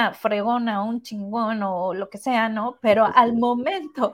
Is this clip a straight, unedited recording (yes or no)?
yes